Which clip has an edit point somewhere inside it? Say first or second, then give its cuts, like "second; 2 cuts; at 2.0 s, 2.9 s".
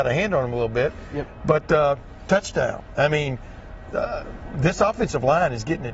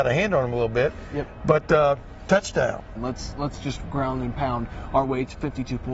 second; 1 cut; at 3.0 s